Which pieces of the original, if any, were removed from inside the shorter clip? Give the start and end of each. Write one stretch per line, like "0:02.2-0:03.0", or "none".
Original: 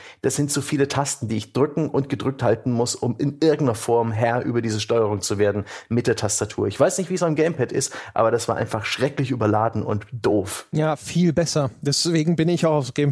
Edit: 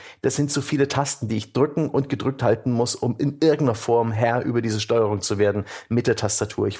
none